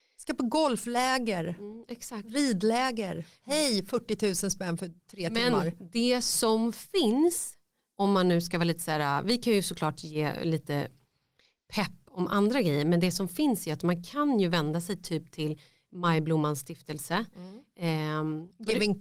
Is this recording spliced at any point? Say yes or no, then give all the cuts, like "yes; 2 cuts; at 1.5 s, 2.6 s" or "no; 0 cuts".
no; 0 cuts